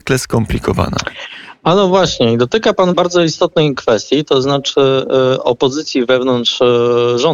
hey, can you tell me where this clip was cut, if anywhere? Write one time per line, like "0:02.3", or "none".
0:02.9